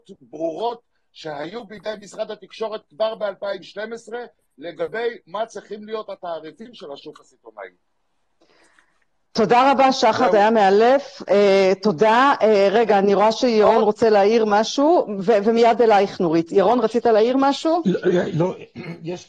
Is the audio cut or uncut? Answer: uncut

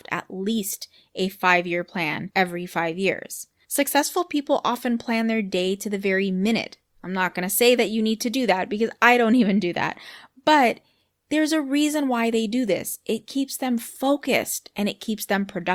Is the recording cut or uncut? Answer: uncut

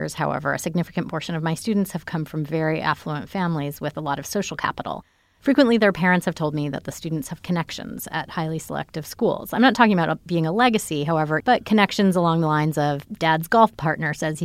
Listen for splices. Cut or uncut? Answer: cut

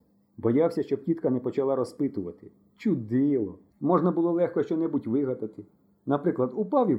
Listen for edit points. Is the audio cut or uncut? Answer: cut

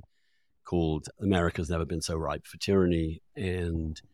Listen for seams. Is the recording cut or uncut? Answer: uncut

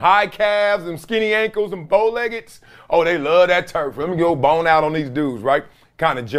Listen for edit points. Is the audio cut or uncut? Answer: uncut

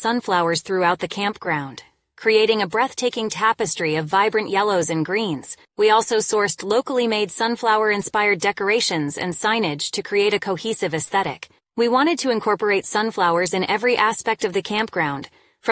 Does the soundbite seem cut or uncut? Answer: cut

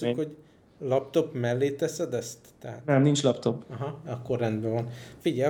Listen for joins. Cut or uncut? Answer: uncut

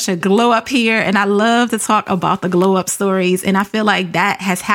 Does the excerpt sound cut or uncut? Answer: uncut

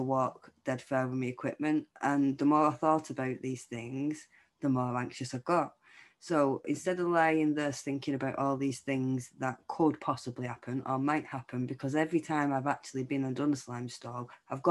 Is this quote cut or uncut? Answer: uncut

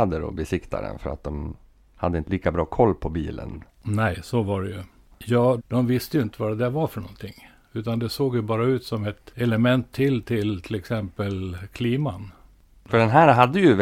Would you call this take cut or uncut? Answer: cut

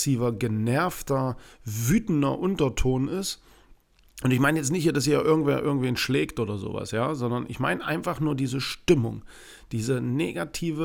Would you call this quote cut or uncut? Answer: uncut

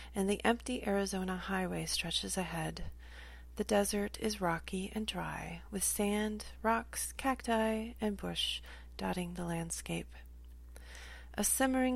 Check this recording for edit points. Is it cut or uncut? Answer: uncut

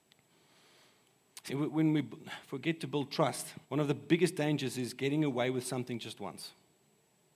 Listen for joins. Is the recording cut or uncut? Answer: cut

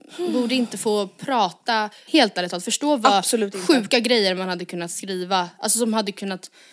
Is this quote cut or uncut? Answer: cut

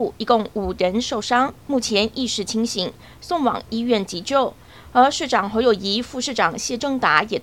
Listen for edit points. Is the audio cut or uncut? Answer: uncut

